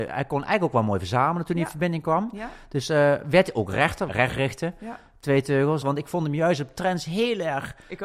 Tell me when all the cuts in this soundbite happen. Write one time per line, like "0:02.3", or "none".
0:04.1
0:05.8